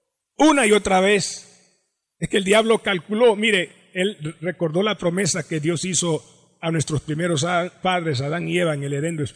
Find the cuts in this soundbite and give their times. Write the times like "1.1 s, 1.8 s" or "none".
2.1 s